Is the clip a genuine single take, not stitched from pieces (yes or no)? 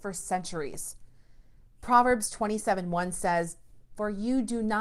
no